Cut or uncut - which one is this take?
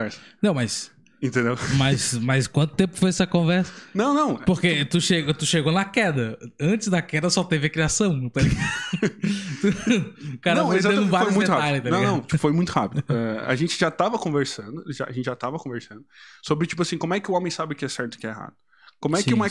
uncut